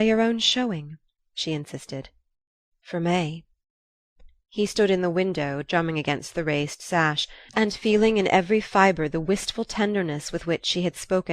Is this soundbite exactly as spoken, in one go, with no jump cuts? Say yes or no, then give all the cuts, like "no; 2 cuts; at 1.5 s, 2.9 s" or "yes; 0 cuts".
no; 1 cut; at 2.8 s